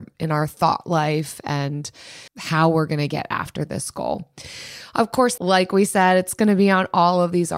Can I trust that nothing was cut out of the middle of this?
no; 2 cuts; at 2.3 s, 5.4 s

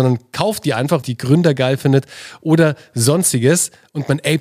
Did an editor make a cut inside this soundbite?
yes; 1 cut; at 1.0 s

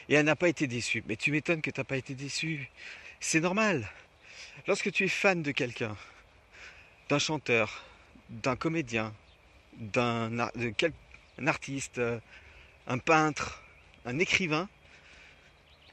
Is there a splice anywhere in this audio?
no; 0 cuts

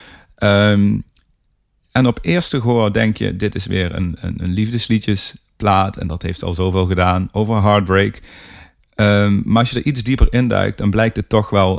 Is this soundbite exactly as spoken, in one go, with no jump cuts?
yes; 0 cuts

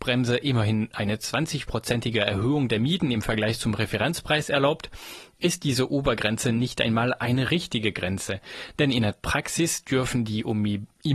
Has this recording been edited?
no; 0 cuts

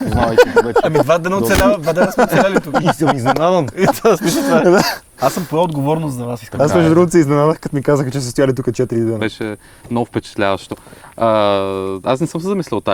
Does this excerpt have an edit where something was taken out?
yes; 2 cuts; at 2.8 s, 9.2 s

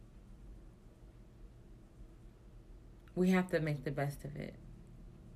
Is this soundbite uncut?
yes; 0 cuts

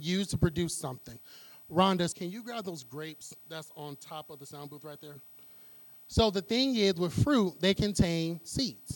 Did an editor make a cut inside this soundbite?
yes; 2 cuts; at 2.1 s, 5.9 s

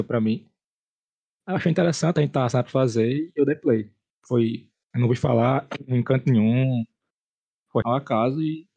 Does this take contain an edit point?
yes; 1 cut; at 7.8 s

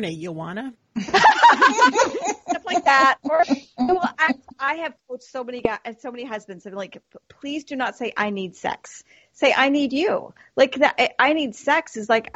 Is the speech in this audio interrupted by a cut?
no; 0 cuts

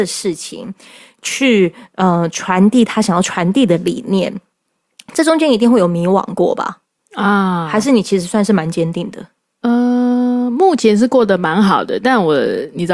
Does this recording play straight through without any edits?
yes; 0 cuts

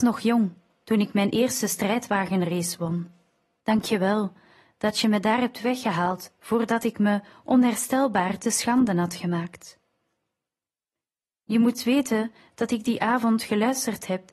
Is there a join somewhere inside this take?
yes; 1 cut; at 3.6 s

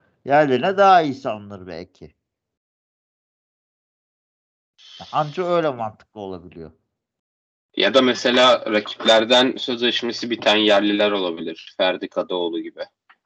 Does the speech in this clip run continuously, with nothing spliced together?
yes; 0 cuts

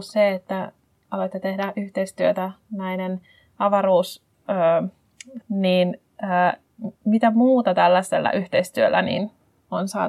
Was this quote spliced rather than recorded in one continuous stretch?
yes; 2 cuts; at 5.4 s, 7.0 s

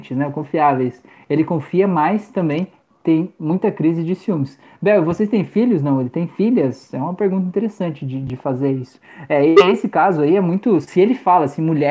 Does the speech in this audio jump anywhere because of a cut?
no; 0 cuts

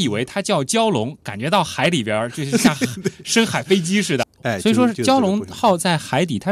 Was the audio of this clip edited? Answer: yes; 1 cut; at 4.2 s

